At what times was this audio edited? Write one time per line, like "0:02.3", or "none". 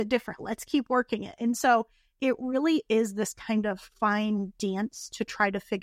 none